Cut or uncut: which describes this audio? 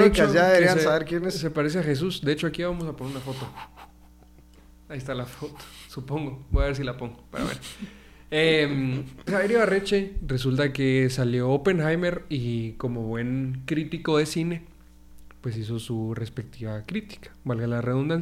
cut